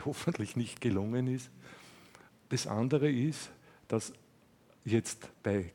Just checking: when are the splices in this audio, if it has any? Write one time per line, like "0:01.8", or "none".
none